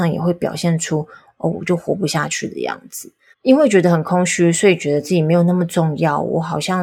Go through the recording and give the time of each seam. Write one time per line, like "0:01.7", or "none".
0:01.5
0:03.3